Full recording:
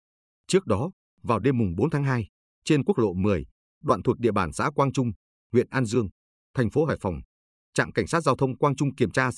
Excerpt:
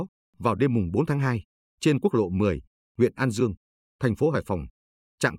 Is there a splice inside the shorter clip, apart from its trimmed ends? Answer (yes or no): yes